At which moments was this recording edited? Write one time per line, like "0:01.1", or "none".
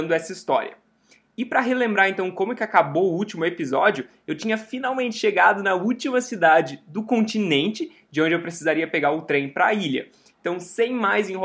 0:10.3